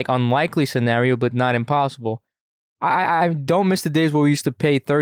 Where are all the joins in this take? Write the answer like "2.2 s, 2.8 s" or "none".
none